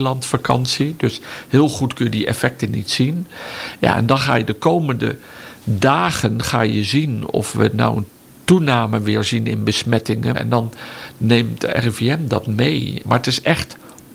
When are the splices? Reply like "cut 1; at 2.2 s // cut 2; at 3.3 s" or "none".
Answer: cut 1; at 10.3 s // cut 2; at 13.0 s